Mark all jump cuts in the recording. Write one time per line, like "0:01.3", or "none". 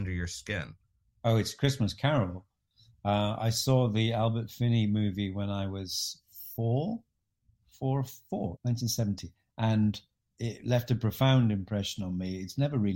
0:08.6
0:10.3